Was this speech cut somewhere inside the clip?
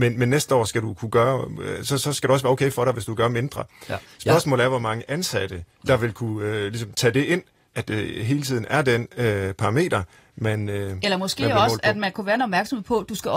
yes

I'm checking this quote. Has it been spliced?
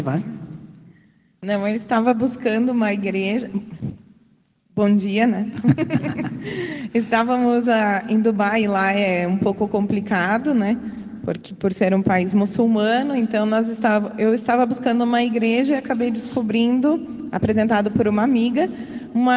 no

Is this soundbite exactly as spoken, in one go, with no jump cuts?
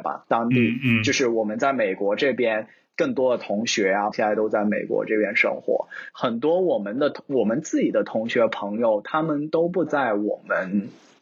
no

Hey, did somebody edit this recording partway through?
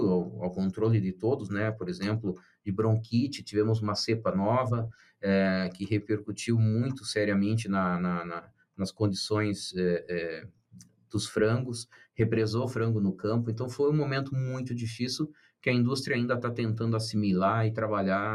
no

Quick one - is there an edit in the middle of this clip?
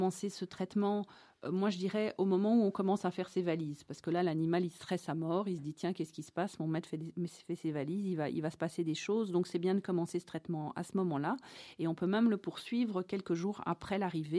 no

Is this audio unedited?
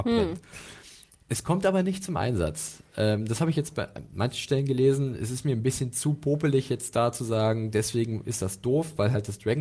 yes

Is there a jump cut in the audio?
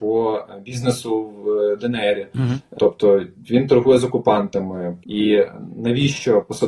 yes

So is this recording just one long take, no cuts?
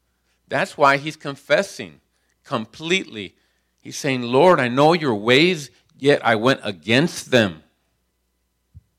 yes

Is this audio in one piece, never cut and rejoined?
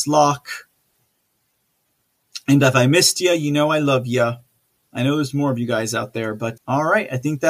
no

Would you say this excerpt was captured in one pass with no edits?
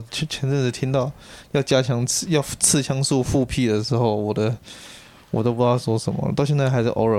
yes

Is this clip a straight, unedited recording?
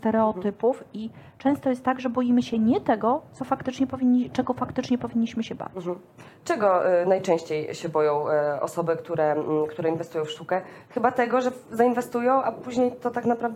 yes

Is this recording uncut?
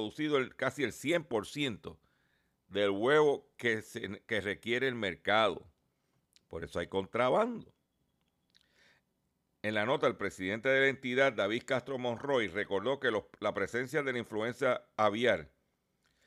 yes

